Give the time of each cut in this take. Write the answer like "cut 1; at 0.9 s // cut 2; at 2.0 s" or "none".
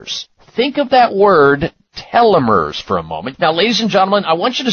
cut 1; at 3.3 s